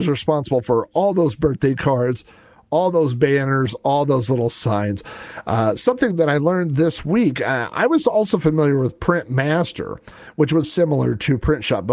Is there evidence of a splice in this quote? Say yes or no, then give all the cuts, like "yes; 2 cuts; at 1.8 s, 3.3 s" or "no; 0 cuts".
yes; 1 cut; at 10.6 s